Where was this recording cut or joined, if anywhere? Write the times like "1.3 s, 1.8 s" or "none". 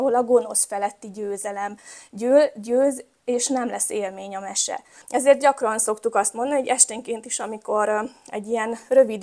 5.0 s

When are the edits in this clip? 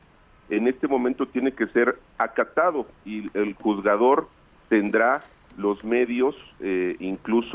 none

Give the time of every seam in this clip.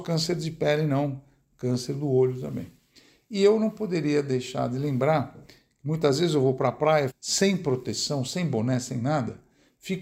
7.1 s

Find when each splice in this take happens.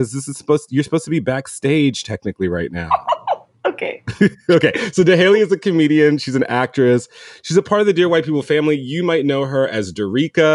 none

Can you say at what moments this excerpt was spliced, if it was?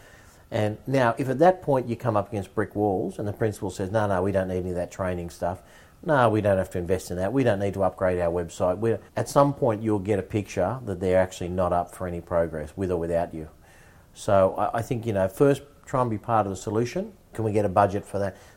9.1 s, 17.3 s

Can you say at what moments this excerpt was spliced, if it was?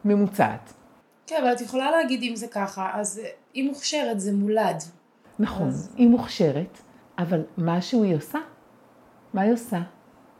7.0 s

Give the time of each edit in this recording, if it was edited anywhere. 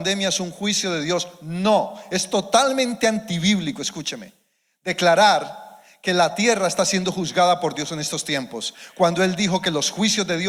none

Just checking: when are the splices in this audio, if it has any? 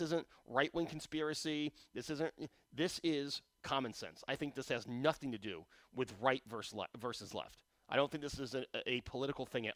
3.5 s

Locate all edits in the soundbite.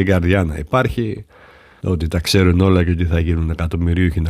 1.8 s

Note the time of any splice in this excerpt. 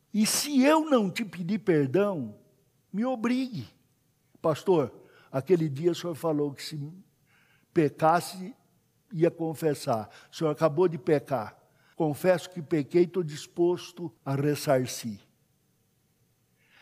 11.9 s, 14.2 s

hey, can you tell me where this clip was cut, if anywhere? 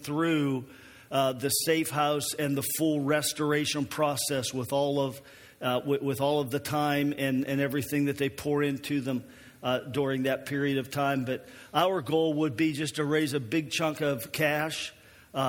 none

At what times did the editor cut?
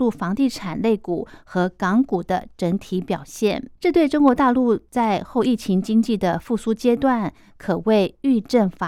3.8 s

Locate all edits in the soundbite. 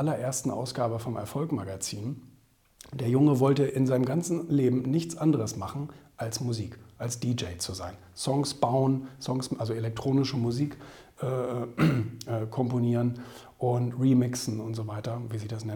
none

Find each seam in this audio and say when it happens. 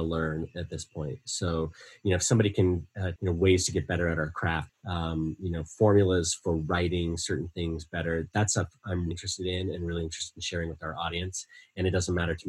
3.2 s, 4.7 s, 9.1 s

